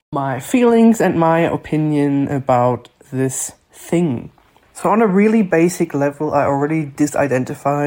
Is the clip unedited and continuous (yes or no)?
yes